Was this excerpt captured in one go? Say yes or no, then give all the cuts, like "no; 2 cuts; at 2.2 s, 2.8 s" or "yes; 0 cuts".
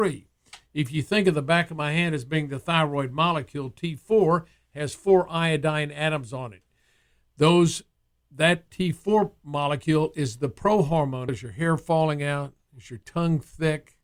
no; 1 cut; at 11.3 s